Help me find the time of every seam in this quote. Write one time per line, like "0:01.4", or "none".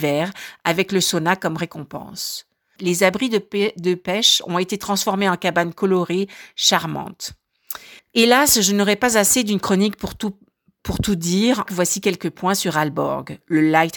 0:02.8
0:08.0
0:11.7